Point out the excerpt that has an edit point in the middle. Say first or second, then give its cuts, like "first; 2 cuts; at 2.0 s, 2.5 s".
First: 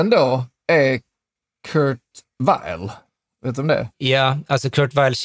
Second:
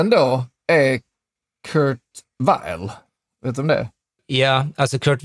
first; 1 cut; at 3.9 s